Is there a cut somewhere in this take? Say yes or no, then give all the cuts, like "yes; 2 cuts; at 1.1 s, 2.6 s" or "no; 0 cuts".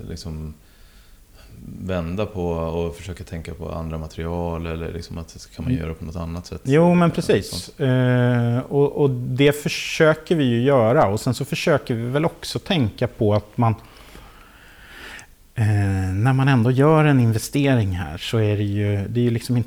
no; 0 cuts